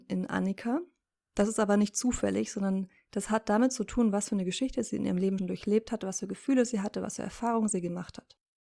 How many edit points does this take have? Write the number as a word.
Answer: one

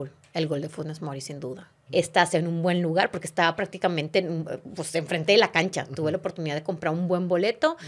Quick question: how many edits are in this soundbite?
one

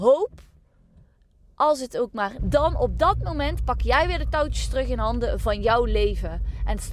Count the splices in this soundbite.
one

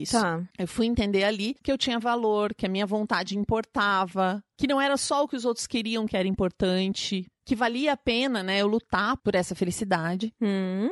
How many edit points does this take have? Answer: one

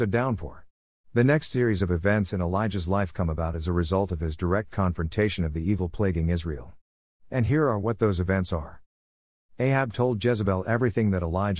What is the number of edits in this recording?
one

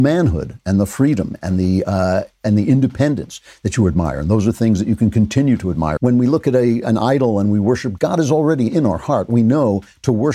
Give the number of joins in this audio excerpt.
two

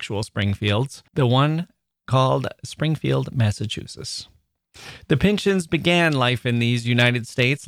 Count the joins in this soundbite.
one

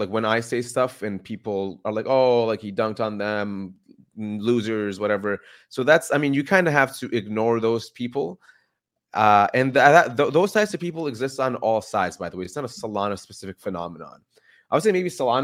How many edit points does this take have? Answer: zero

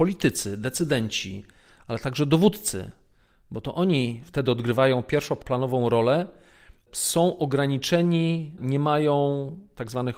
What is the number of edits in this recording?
zero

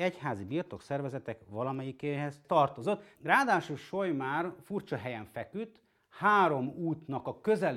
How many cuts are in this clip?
one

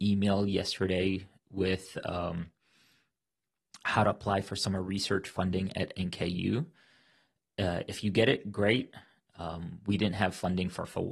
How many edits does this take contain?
one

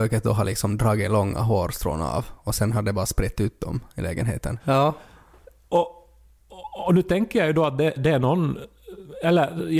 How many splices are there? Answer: two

